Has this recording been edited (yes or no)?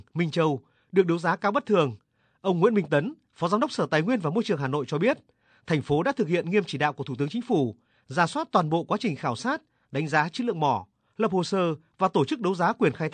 no